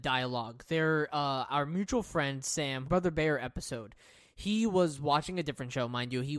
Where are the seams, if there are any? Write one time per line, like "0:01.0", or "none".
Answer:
0:02.8